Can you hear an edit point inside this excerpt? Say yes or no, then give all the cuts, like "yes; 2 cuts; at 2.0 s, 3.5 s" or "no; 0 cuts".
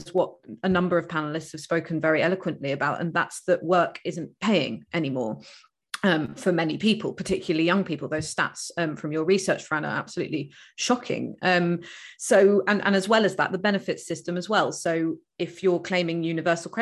no; 0 cuts